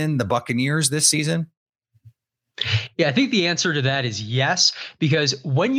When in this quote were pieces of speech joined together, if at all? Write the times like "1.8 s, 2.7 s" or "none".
none